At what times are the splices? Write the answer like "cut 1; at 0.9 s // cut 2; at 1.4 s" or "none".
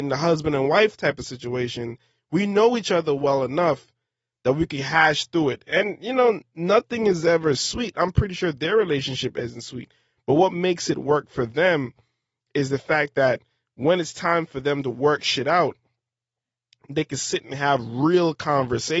none